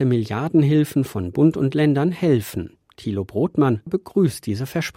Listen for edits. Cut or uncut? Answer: cut